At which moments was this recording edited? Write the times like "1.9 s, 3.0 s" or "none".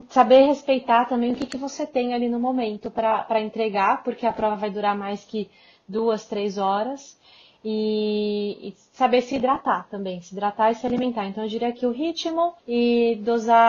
12.6 s